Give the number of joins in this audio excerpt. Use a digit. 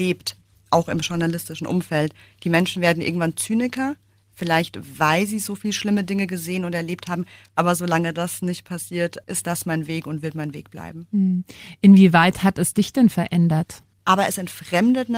2